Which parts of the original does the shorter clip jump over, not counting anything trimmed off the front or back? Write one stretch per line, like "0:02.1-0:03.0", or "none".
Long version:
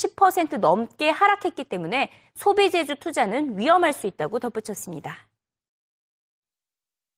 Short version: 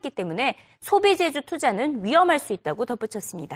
none